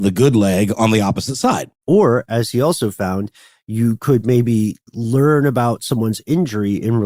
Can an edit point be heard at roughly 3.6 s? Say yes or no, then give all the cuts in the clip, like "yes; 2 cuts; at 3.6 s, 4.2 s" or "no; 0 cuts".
no; 2 cuts; at 1.8 s, 4.9 s